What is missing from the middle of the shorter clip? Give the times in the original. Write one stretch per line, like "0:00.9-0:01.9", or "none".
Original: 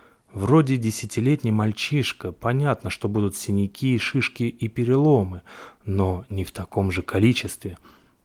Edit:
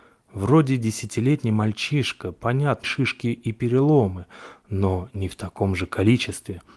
0:02.8-0:04.0